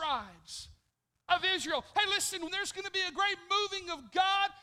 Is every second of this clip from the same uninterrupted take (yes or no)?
no